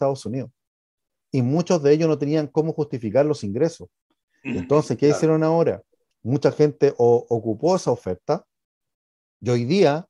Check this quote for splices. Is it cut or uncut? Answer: cut